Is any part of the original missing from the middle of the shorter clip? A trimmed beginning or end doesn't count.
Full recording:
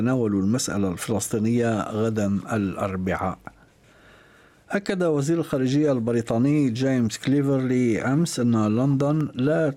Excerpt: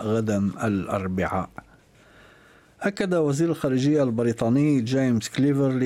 no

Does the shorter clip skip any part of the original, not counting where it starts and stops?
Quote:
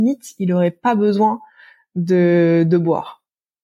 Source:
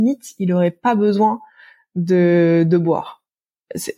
no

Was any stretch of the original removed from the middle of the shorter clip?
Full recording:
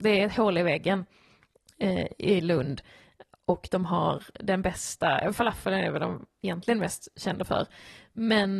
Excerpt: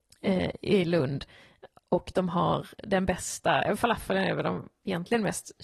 no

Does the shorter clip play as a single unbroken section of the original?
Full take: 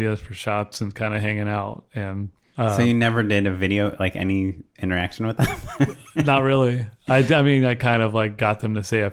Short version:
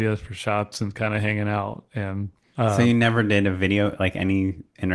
yes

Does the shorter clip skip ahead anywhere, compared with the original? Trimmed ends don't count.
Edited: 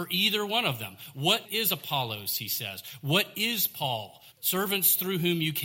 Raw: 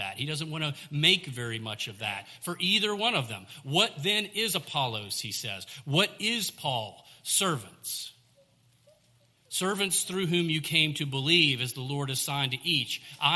yes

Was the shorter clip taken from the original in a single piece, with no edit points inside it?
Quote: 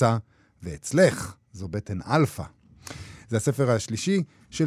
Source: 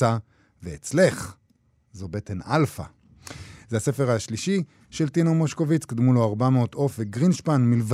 no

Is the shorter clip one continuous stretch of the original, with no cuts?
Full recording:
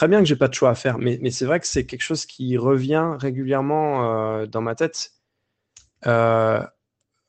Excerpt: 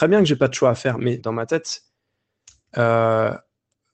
no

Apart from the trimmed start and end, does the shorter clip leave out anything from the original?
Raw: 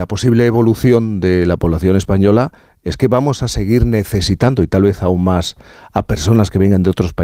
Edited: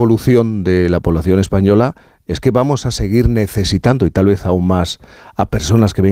no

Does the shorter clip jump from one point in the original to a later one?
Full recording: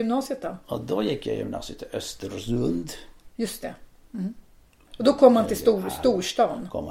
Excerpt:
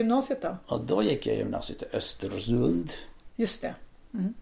no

